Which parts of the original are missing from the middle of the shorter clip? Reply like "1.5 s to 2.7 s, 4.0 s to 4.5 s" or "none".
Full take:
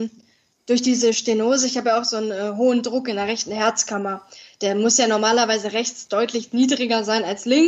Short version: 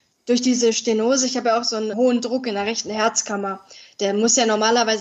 2.3 s to 2.5 s